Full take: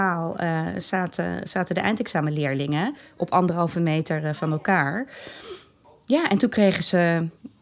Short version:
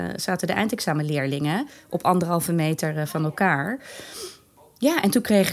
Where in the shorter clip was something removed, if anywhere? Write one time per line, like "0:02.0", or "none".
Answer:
none